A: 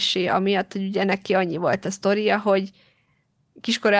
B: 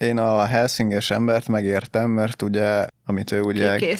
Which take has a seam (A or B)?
B